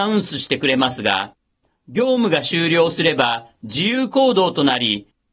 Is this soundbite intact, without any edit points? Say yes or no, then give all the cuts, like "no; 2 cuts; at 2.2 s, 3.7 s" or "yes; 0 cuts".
yes; 0 cuts